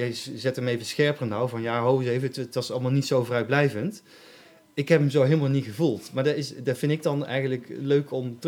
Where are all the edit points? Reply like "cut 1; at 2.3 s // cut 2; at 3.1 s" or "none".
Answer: none